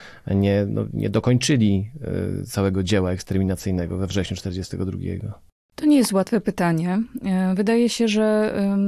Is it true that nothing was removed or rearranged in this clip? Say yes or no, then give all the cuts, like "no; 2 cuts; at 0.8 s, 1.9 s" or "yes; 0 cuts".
yes; 0 cuts